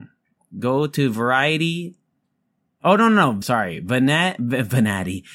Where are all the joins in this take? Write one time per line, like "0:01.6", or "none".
0:03.4